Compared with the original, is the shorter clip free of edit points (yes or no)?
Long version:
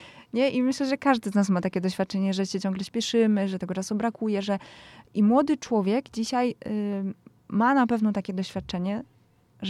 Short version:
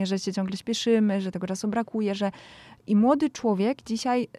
yes